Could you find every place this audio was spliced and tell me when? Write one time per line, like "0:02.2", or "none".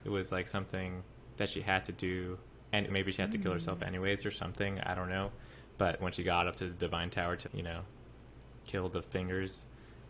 0:02.9
0:06.0
0:07.4